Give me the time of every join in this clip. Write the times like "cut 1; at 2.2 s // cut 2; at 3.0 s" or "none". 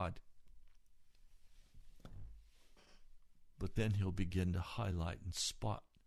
none